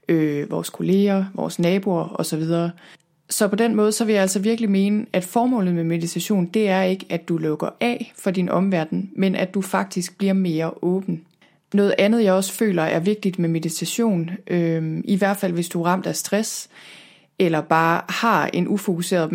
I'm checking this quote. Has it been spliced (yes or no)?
no